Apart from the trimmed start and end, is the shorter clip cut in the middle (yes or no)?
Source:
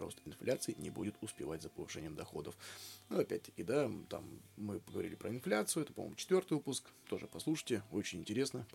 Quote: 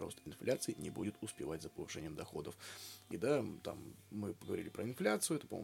yes